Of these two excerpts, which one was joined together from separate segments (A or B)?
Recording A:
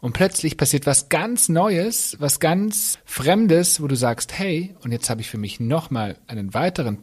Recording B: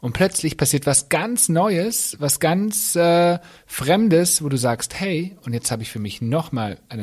A